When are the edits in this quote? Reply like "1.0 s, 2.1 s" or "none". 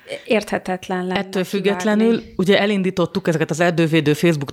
none